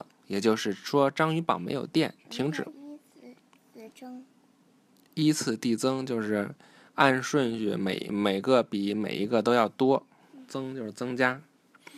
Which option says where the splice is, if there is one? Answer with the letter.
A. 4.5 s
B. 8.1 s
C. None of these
B